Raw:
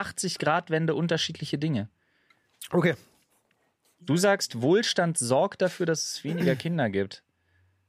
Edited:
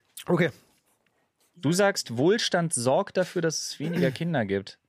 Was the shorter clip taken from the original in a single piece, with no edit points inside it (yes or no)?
yes